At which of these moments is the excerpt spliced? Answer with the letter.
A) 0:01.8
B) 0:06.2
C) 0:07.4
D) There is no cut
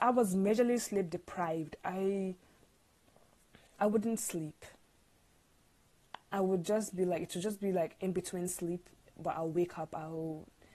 D